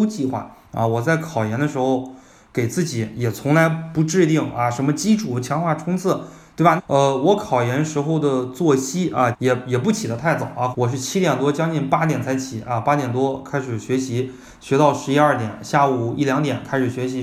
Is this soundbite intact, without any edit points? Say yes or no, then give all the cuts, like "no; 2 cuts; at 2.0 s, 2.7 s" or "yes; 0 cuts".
no; 3 cuts; at 6.8 s, 9.3 s, 10.7 s